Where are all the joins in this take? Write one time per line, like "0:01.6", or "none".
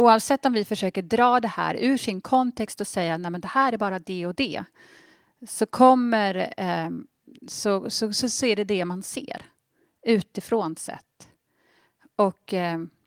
none